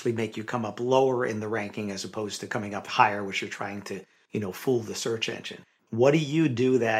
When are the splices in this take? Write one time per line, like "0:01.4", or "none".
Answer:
0:05.8

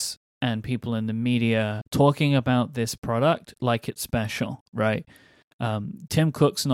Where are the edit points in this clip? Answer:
0:01.8

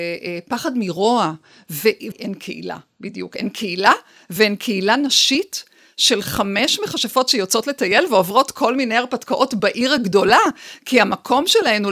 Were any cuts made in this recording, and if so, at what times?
0:02.1

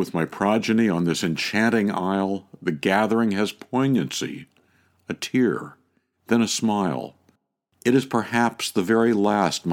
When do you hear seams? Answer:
none

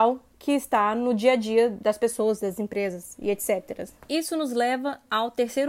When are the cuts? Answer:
none

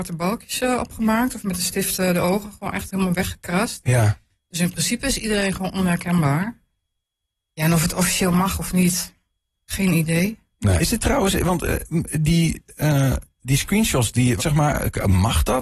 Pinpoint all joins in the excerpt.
0:10.8
0:14.4

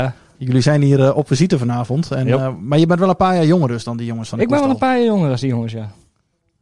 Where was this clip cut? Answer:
none

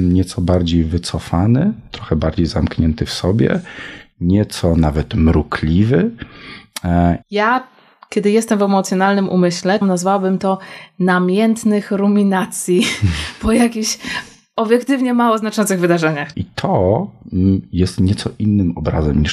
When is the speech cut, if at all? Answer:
0:07.2
0:09.8
0:16.3

